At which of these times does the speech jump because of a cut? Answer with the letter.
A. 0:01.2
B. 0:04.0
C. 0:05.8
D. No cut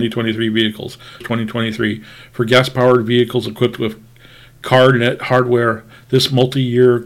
A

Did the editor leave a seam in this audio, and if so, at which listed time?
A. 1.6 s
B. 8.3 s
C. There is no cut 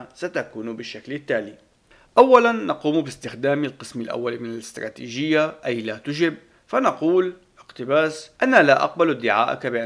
B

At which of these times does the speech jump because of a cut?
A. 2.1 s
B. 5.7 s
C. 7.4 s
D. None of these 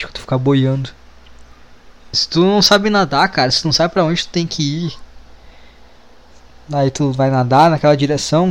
A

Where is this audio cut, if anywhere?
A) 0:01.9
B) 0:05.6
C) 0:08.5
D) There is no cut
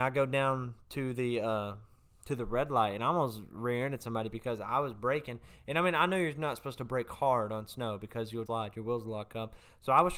C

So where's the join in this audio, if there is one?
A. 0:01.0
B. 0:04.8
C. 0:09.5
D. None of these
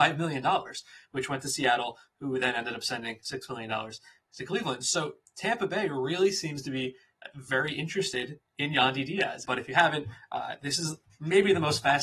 C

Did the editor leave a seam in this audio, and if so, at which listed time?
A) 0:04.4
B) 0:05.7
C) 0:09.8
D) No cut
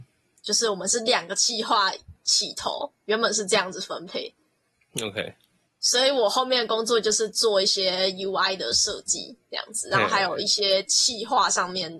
B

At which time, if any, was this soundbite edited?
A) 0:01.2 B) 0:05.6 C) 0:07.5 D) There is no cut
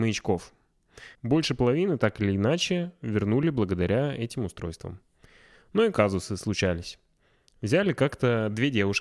A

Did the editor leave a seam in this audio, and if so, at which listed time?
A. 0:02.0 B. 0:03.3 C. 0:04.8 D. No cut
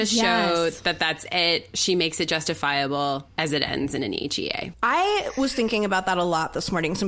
D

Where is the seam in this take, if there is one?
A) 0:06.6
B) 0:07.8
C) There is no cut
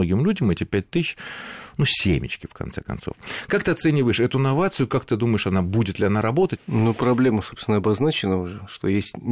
A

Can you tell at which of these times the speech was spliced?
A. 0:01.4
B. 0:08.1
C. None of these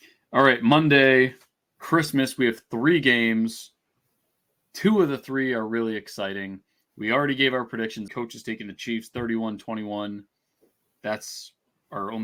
B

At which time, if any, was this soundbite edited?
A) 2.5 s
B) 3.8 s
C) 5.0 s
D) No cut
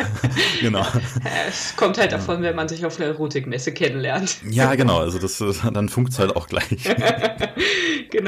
D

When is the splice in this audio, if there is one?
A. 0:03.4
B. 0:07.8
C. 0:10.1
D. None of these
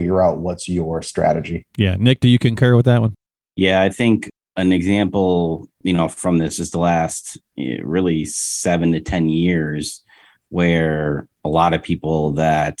D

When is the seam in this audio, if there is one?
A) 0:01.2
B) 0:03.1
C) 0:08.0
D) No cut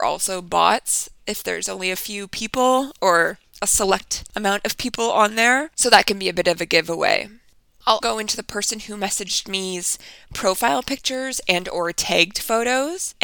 C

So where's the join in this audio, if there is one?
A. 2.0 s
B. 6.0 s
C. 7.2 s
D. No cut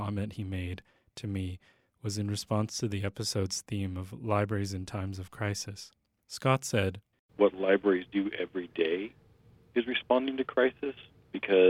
C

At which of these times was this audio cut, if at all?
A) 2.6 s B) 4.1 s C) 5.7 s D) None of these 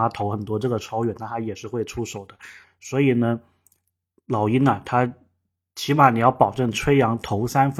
A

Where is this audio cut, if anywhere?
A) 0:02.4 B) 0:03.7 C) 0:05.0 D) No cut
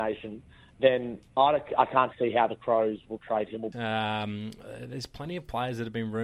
B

